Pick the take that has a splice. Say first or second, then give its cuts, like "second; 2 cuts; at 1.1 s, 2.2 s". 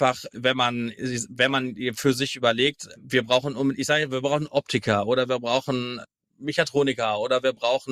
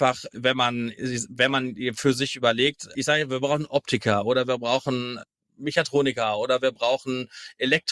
second; 1 cut; at 2.9 s